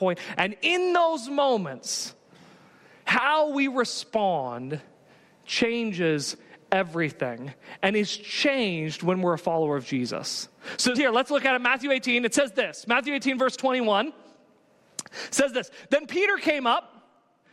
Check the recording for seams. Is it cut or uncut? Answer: cut